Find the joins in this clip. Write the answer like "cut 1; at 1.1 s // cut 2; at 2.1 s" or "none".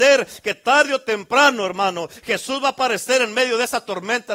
none